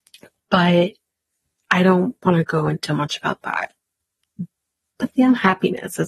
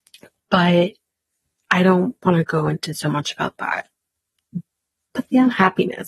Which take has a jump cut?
first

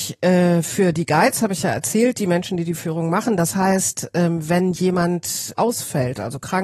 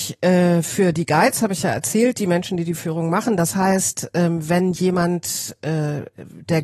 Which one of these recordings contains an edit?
first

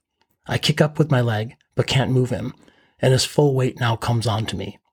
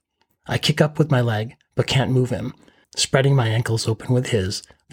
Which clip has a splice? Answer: second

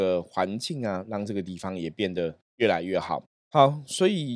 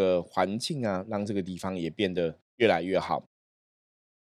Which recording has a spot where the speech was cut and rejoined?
first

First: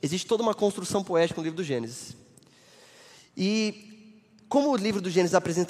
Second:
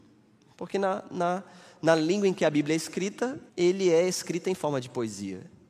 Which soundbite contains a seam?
second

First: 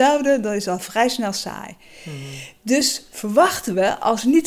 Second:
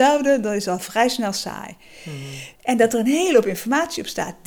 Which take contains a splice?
second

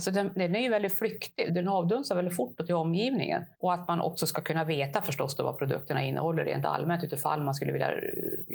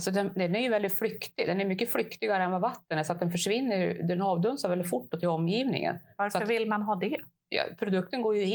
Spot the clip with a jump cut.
first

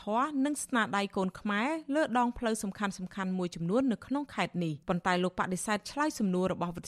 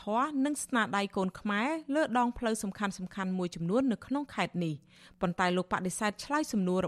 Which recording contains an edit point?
first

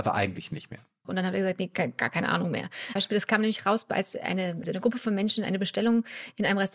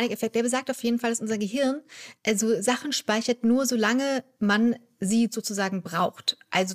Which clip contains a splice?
first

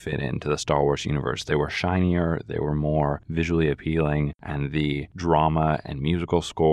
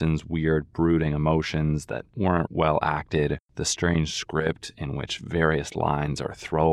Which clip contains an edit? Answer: second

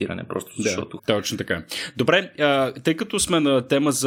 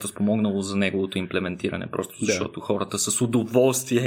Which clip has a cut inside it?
first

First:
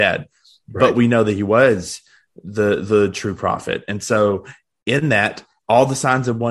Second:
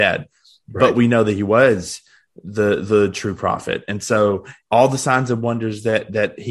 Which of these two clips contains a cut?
second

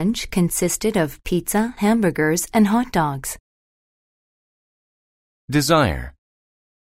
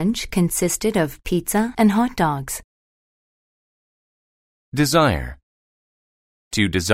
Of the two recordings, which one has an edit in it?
second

